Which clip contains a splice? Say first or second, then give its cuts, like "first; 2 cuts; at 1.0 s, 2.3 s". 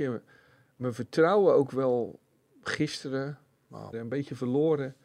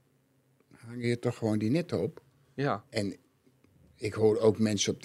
first; 1 cut; at 3.9 s